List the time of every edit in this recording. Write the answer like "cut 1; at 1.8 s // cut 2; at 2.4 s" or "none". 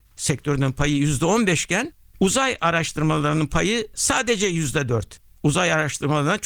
cut 1; at 5.4 s